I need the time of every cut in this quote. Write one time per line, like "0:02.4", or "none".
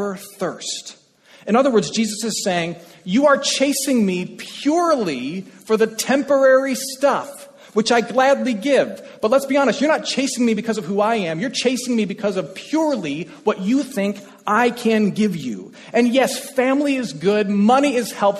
none